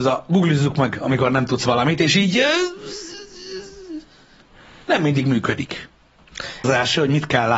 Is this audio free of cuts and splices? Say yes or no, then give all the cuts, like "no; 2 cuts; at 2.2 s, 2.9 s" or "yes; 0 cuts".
no; 1 cut; at 6.6 s